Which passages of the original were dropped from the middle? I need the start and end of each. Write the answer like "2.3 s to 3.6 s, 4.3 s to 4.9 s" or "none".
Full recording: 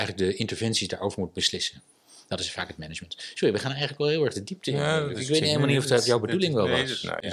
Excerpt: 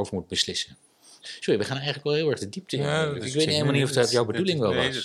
2.3 s to 3.2 s